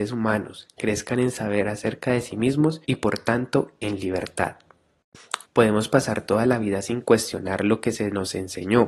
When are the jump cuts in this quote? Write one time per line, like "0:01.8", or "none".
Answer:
0:02.8
0:05.4

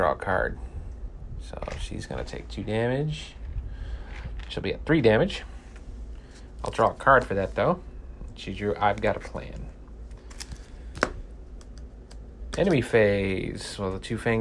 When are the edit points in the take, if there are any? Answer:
none

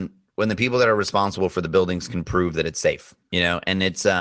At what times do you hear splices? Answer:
0:03.3

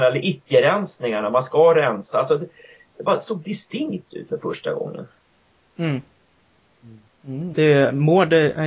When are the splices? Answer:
0:07.5

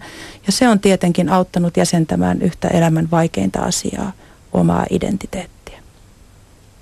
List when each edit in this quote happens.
none

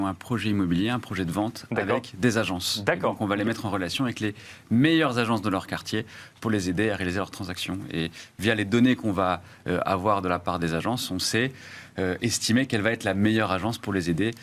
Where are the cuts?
none

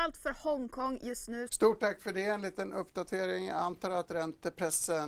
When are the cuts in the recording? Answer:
0:01.5

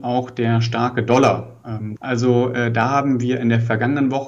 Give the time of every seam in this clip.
0:02.0

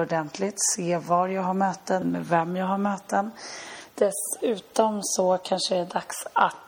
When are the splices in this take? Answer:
0:02.0
0:03.9

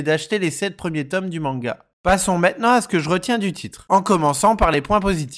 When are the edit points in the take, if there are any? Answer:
none

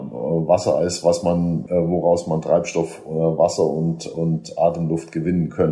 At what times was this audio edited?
none

